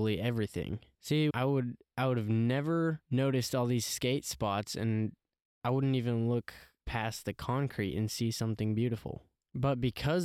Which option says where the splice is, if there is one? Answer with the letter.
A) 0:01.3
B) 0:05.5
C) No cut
A